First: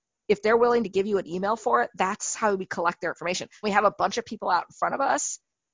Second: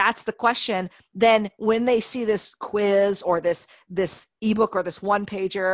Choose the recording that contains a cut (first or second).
first